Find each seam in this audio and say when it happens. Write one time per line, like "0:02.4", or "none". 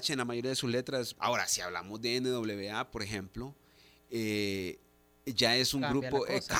0:01.1